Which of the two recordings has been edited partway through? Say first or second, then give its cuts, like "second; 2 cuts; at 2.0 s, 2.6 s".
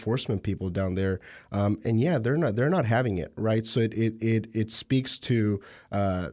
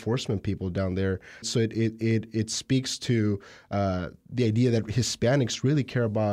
second; 1 cut; at 1.4 s